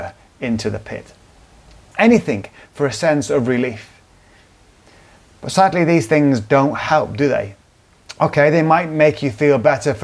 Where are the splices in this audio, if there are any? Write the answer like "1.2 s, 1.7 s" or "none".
1.9 s

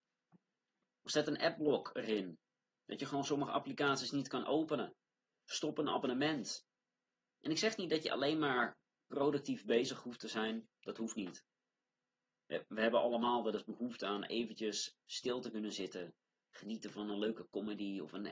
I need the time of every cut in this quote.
none

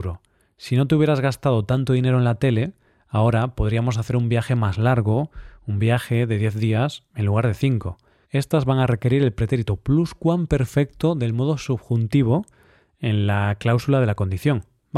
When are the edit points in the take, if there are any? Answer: 8.2 s

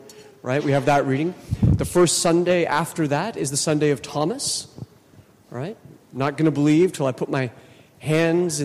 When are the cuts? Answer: none

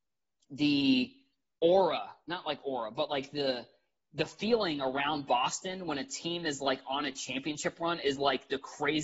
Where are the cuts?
none

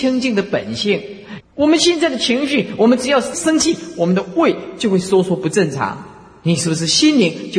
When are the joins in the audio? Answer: 1.4 s

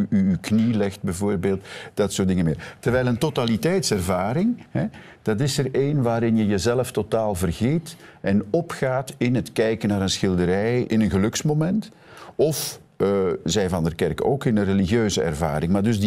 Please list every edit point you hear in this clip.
10.8 s

